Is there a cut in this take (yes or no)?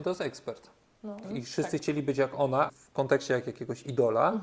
yes